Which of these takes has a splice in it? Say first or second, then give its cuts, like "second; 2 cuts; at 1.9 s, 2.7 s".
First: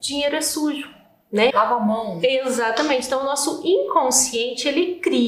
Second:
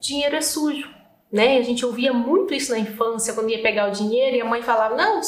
first; 1 cut; at 1.5 s